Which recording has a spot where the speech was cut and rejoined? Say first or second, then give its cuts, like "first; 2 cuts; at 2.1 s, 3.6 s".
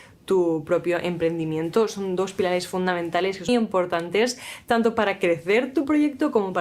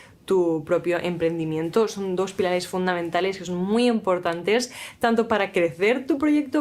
first; 1 cut; at 3.5 s